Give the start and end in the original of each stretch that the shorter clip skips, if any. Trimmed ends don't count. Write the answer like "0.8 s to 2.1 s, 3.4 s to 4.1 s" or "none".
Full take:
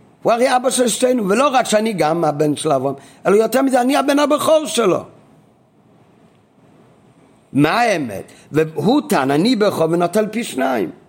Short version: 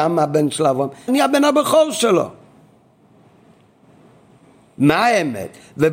3.1 s to 3.8 s

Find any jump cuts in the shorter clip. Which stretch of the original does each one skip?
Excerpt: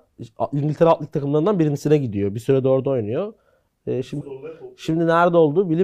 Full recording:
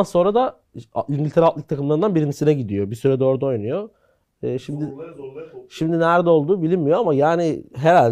4.8 s to 5.1 s

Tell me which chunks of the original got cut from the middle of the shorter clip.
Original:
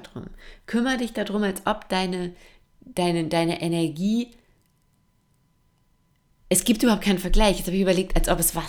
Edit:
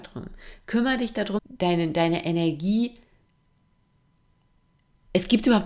1.4 s to 2.7 s

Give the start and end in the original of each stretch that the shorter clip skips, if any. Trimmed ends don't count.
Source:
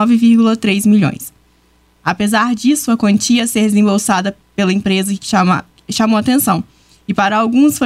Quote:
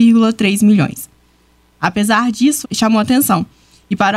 2.9 s to 5.8 s

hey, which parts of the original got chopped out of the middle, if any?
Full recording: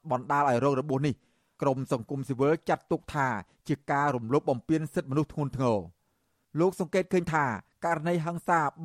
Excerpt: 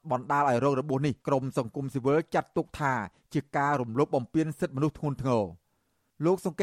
1.2 s to 1.5 s

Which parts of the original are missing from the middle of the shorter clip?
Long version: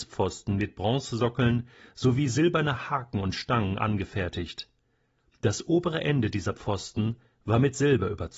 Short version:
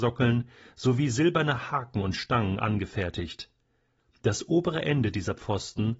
none

